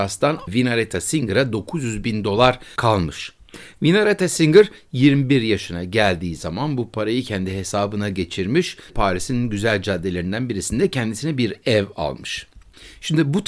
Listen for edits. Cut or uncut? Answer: cut